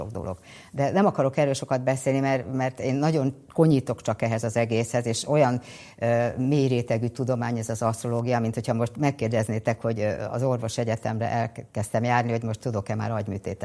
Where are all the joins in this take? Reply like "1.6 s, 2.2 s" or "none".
none